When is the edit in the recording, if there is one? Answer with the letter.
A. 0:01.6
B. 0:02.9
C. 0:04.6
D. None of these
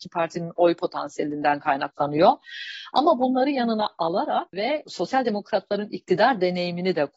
D